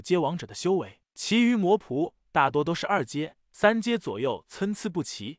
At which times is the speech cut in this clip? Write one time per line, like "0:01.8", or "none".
none